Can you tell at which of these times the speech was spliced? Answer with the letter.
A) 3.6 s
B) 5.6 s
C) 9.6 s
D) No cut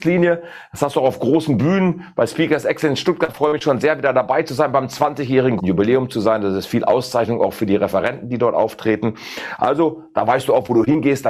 B